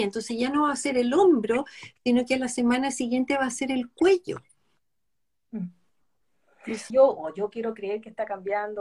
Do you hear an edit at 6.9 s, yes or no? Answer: yes